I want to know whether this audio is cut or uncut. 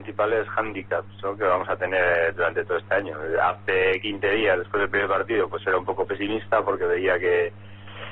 uncut